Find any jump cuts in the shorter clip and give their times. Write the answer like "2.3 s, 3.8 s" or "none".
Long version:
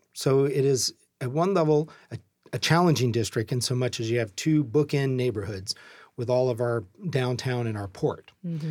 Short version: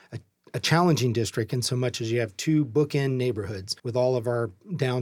3.8 s